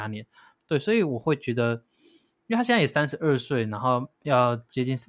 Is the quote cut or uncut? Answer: uncut